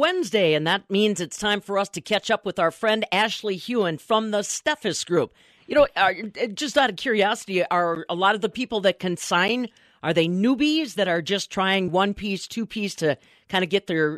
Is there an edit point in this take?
yes; 2 cuts; at 5.6 s, 11.9 s

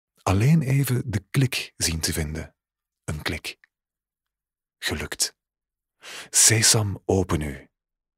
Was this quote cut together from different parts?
yes; 1 cut; at 2.9 s

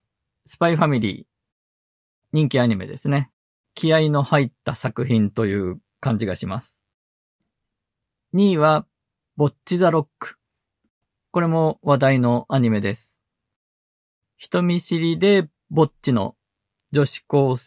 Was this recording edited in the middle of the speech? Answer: yes; 1 cut; at 3.6 s

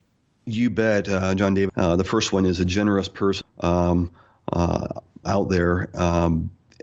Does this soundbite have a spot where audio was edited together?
yes; 3 cuts; at 1.7 s, 3.4 s, 5.2 s

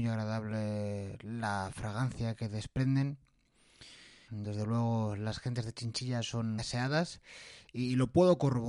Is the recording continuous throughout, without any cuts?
no; 2 cuts; at 4.3 s, 6.6 s

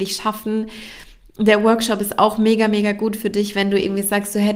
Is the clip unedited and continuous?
yes; 0 cuts

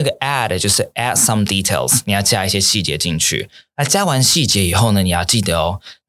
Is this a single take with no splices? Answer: yes; 0 cuts

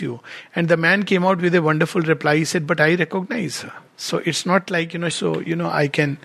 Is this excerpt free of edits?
no; 2 cuts; at 3.9 s, 5.1 s

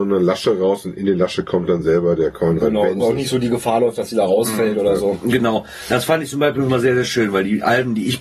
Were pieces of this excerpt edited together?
yes; 1 cut; at 3.0 s

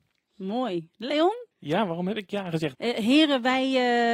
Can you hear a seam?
yes; 2 cuts; at 1.5 s, 2.7 s

